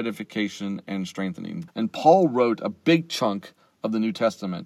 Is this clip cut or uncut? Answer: cut